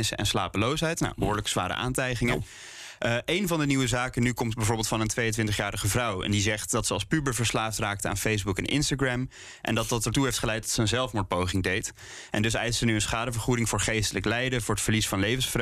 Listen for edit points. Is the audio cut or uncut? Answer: uncut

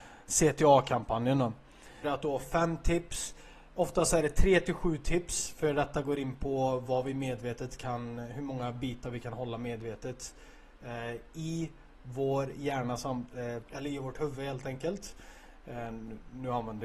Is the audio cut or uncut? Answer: cut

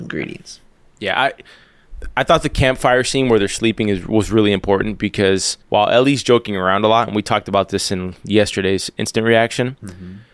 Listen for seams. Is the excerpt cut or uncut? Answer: cut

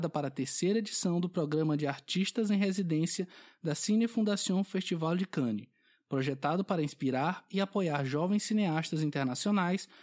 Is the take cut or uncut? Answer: uncut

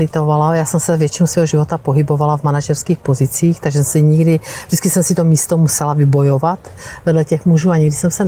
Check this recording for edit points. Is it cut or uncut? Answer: uncut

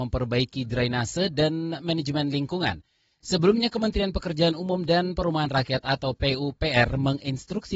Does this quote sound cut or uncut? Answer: uncut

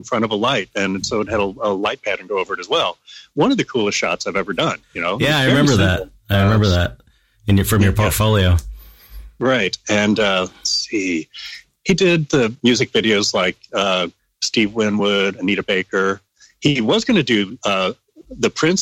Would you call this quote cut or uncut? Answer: uncut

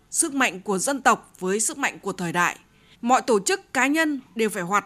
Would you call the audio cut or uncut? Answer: cut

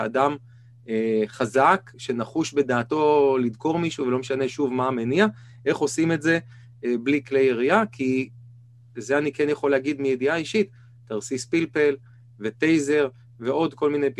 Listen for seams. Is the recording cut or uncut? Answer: uncut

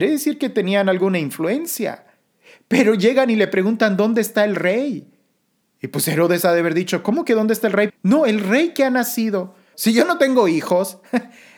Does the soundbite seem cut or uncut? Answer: cut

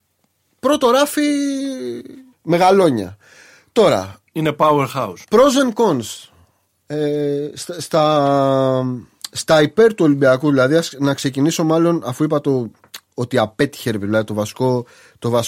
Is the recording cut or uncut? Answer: cut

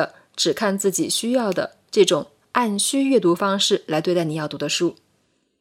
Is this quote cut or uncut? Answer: uncut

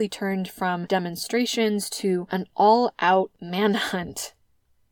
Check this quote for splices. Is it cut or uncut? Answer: uncut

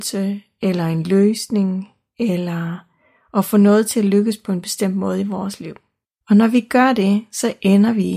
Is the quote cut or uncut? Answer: cut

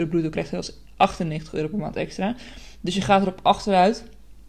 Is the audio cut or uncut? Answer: uncut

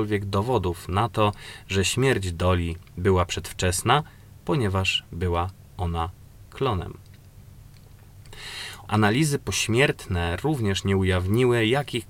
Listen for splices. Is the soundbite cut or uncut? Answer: cut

